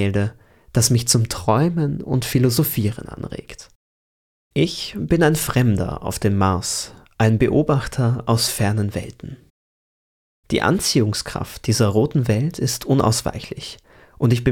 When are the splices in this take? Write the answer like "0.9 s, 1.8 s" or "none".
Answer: none